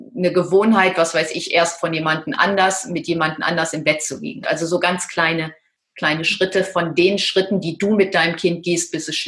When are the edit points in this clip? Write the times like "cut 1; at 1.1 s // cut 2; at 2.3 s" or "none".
cut 1; at 4.4 s